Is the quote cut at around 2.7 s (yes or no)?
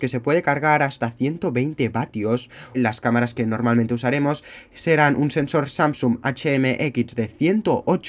yes